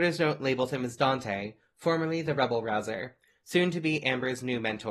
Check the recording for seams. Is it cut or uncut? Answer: uncut